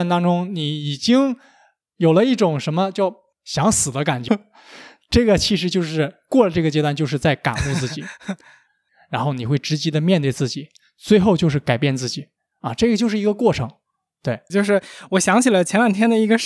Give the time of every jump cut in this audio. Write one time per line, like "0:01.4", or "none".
0:04.3
0:14.5